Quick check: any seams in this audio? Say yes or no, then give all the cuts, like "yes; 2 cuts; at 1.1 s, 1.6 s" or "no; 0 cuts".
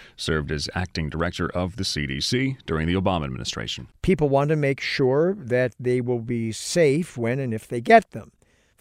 yes; 1 cut; at 3.9 s